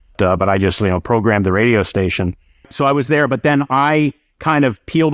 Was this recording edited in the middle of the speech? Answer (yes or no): no